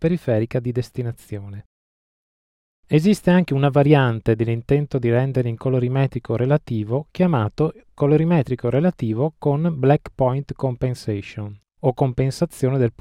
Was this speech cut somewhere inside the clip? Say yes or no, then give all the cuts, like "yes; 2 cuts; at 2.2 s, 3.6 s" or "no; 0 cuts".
no; 0 cuts